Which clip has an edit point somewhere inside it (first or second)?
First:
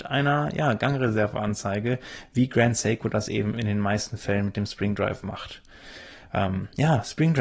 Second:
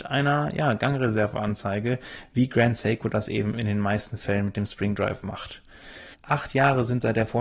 second